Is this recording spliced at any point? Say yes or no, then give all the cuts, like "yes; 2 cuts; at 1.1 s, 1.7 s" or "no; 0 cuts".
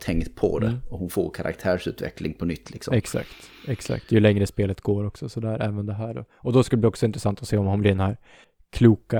no; 0 cuts